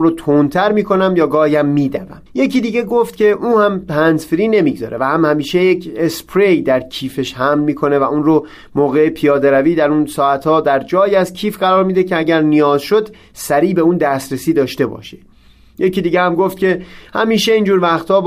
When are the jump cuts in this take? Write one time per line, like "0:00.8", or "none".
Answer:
0:02.3